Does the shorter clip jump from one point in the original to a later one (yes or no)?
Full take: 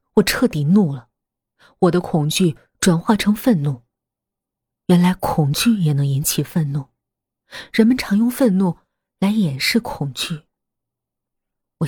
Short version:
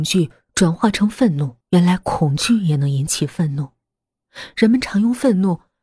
yes